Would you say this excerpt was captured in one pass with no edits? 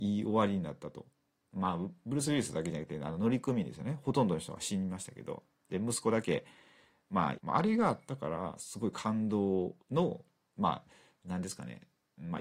no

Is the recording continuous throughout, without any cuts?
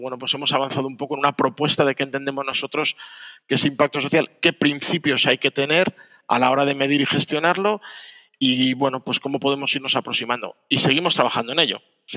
yes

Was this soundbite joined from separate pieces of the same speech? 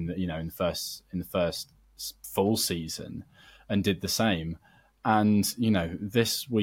no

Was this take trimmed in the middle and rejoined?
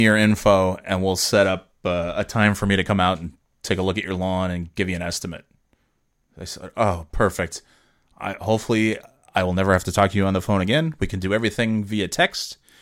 no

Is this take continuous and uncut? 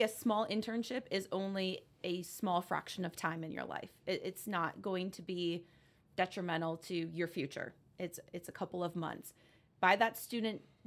yes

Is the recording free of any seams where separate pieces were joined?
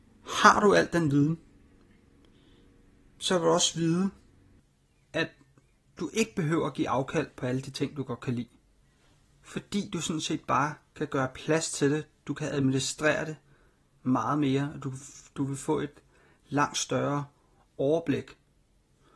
yes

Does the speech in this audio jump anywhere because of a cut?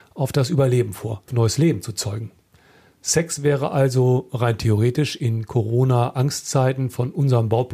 yes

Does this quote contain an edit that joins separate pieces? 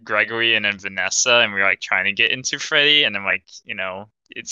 no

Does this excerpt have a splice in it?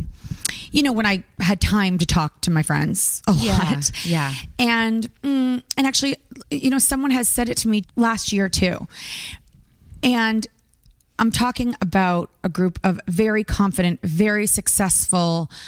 yes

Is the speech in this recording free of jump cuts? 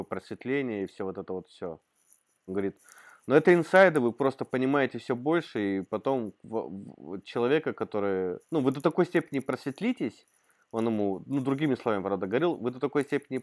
no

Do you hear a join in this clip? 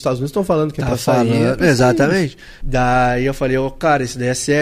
yes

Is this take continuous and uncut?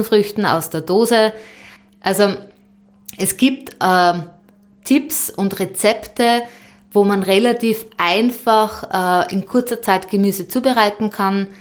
yes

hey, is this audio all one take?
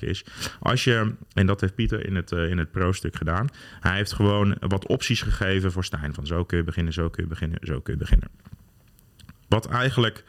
yes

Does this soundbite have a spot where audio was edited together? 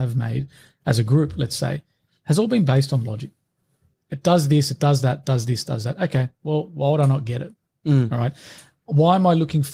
no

